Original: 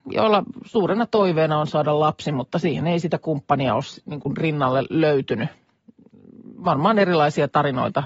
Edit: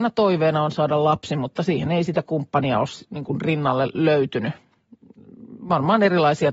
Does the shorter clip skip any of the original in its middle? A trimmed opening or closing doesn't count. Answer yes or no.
no